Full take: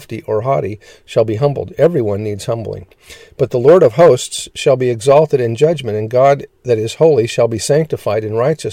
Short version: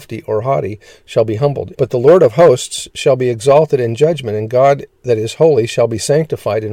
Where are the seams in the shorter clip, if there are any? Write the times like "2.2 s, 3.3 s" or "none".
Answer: 1.7 s

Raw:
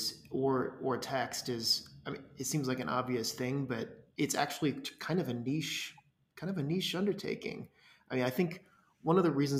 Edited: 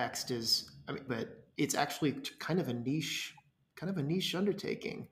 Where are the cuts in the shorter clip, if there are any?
1.1 s

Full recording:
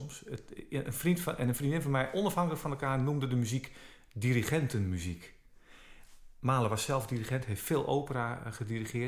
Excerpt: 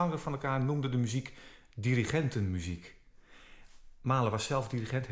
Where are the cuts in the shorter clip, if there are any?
none

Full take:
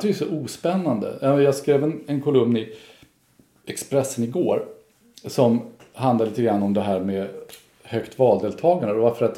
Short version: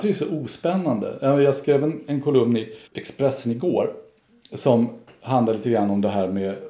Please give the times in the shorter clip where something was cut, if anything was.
2.9 s

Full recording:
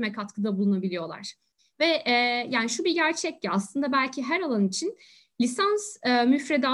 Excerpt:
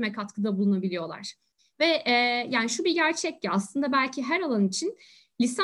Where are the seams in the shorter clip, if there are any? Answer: none

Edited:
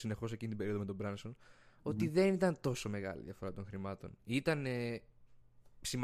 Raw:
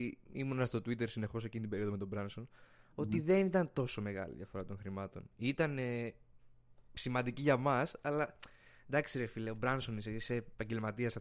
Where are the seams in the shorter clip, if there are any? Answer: none

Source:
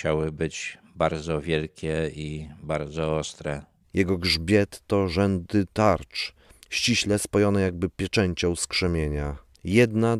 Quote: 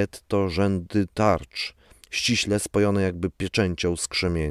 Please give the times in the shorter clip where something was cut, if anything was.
none

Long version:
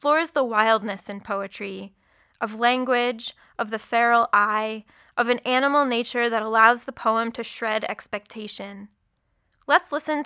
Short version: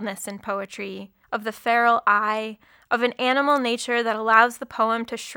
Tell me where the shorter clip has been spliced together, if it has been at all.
1.2 s

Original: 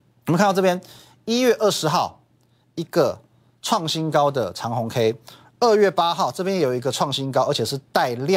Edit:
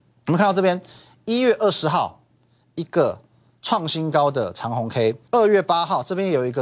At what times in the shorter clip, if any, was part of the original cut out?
5.2 s

